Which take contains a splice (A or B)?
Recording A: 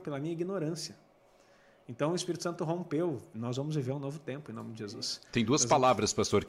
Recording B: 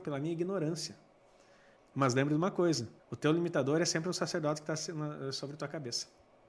B